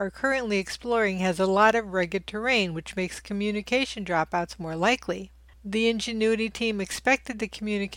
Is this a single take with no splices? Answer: no; 1 cut; at 5.5 s

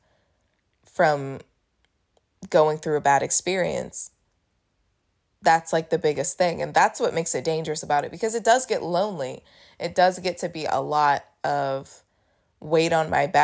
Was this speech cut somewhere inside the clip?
no; 0 cuts

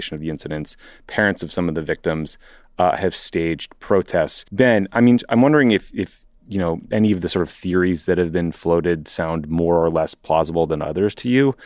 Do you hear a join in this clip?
yes; 1 cut; at 4.5 s

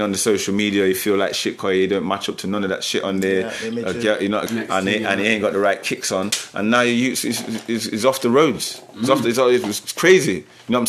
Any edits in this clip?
yes; 1 cut; at 4.5 s

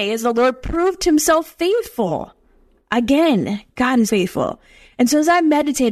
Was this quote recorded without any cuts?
no; 1 cut; at 4.1 s

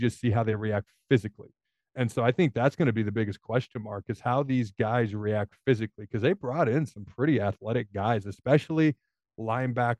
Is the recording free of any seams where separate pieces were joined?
yes; 0 cuts

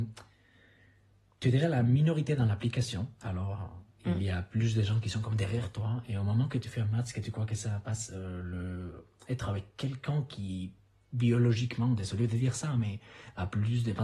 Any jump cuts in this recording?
no; 0 cuts

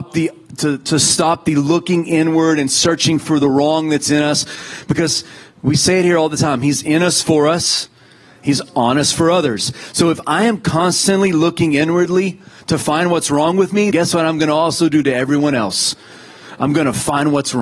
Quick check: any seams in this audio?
yes; 1 cut; at 13.9 s

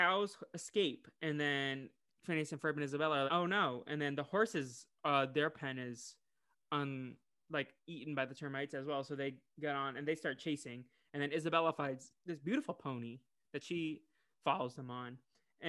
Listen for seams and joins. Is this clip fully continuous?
no; 1 cut; at 3.3 s

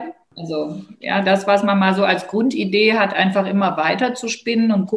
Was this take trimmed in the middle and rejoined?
no; 0 cuts

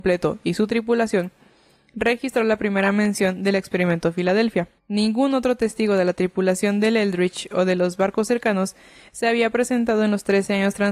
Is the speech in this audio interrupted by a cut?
yes; 1 cut; at 4.8 s

